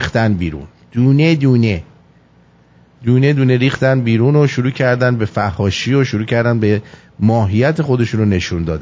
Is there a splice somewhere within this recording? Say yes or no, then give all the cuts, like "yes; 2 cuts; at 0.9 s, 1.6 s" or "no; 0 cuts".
no; 0 cuts